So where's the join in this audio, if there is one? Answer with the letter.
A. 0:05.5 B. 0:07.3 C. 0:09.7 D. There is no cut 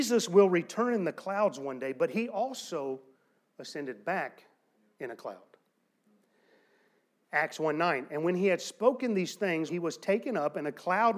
C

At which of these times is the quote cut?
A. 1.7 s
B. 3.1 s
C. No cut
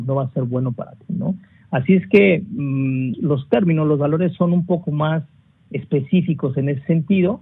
B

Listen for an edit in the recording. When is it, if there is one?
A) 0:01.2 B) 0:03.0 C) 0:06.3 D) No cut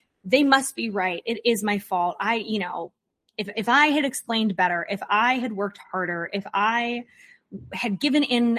D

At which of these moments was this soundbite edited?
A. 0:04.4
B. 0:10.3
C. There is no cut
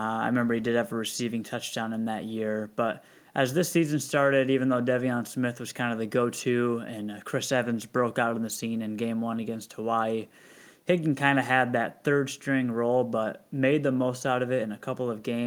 C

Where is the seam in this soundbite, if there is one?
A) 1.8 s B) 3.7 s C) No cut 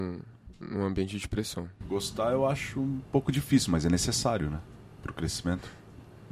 A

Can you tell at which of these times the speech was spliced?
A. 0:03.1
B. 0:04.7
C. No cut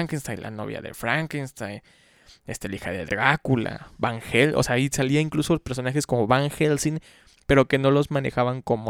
A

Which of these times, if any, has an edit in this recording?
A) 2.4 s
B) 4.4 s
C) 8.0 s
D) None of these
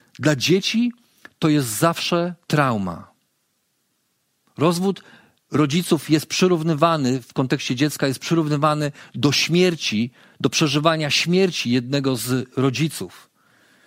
A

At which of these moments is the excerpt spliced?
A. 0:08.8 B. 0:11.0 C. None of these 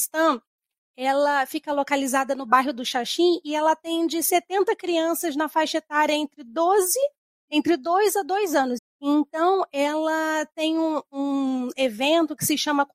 A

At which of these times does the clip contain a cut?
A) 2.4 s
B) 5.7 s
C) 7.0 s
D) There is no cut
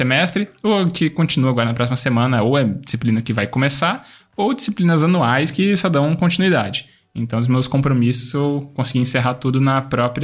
D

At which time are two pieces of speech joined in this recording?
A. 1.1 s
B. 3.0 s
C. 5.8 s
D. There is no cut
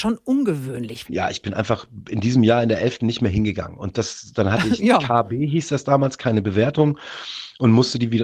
A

